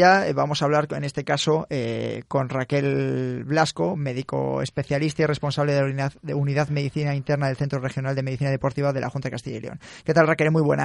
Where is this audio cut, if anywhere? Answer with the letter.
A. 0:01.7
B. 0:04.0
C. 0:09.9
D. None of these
D